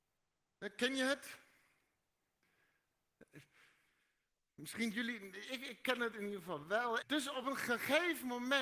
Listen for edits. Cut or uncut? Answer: cut